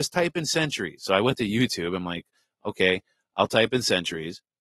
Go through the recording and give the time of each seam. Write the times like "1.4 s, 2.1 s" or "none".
none

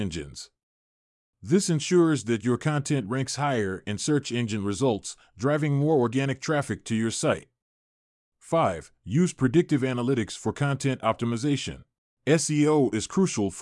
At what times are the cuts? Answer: 12.1 s

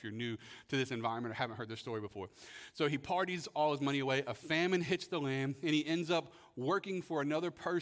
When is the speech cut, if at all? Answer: none

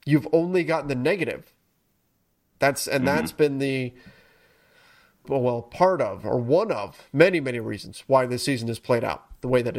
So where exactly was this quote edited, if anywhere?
5.2 s

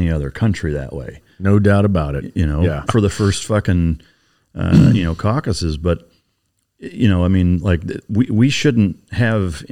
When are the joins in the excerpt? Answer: 2.8 s

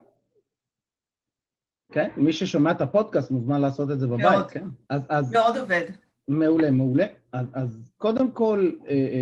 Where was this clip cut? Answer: 1.9 s, 4.8 s

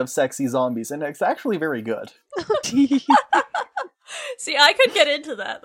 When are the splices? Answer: 2.6 s

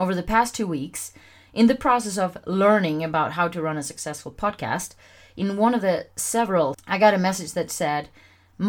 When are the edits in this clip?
6.7 s

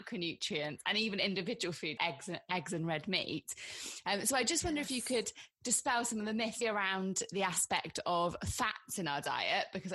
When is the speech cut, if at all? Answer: 2.0 s, 6.6 s

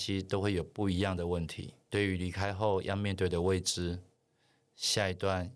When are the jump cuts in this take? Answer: 1.8 s

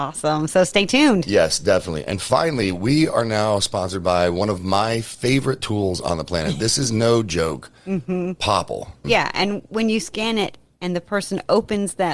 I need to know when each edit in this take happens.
9.0 s

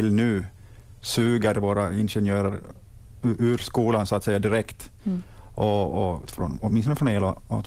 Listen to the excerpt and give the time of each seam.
6.3 s

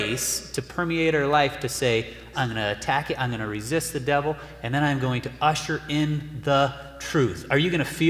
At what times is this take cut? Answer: 2.3 s

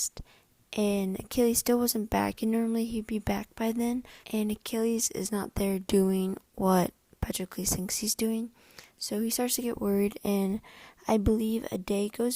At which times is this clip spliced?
4.2 s

